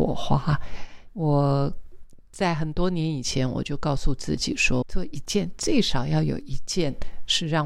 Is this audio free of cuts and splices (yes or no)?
no